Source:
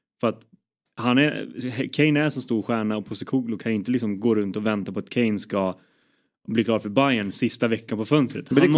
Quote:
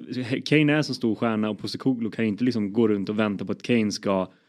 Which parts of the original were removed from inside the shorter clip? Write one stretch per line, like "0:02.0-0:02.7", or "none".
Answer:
none

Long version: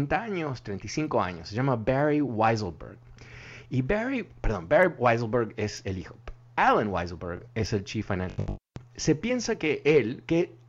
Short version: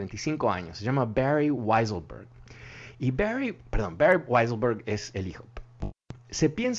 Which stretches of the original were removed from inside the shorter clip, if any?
0:06.5-0:08.5

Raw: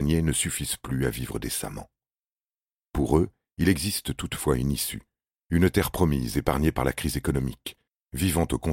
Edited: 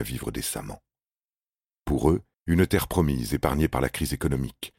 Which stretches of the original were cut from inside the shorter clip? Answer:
0:03.4-0:05.4

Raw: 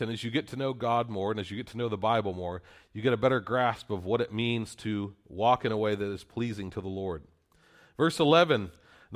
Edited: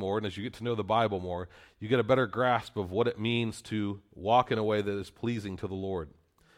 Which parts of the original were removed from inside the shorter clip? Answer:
none

